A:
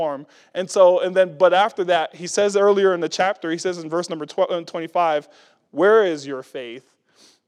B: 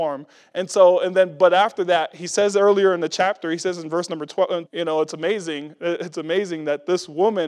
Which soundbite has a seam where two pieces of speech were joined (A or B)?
B